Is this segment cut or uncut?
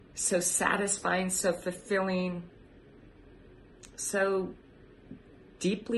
uncut